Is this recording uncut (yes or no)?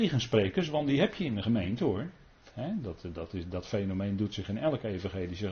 no